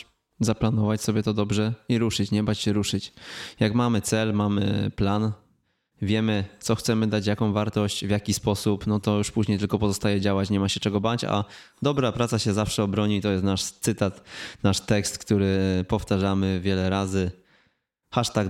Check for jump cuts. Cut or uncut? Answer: uncut